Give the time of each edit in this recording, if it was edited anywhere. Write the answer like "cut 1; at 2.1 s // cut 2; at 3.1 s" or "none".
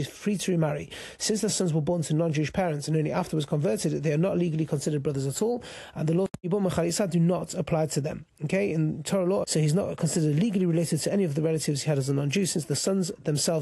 cut 1; at 9.4 s